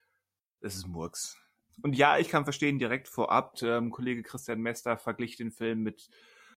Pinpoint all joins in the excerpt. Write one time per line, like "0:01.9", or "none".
0:01.7
0:03.5